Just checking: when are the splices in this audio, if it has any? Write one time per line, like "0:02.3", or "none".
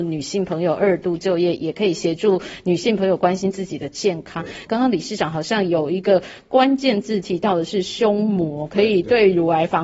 0:04.7

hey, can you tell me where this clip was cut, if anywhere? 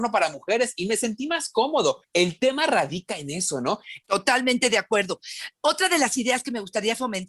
0:04.0

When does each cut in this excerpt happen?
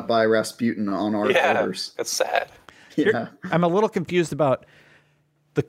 0:02.0
0:03.5

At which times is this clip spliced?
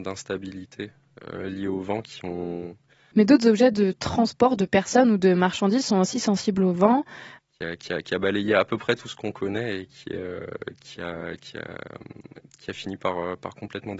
0:03.1
0:07.4

